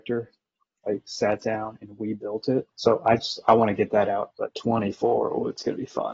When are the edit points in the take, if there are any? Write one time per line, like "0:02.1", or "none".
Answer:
0:02.7
0:04.3